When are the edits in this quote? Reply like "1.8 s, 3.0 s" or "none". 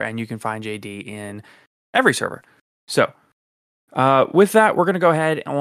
none